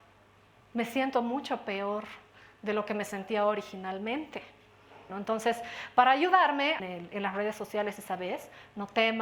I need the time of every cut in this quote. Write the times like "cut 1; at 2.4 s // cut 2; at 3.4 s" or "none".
cut 1; at 5.1 s // cut 2; at 6.8 s

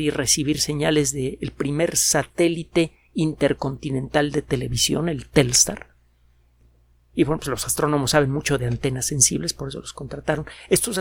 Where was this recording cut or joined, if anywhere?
none

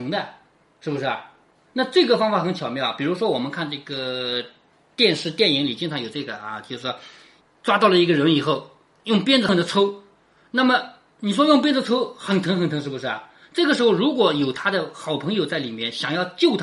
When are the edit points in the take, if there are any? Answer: cut 1; at 9.5 s

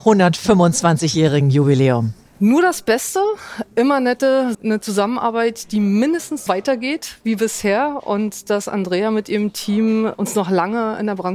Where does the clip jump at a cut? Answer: cut 1; at 4.5 s // cut 2; at 6.5 s

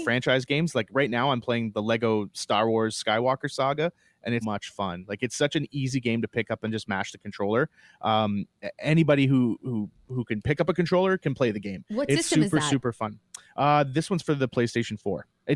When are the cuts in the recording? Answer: cut 1; at 4.4 s

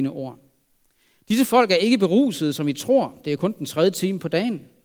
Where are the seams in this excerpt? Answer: none

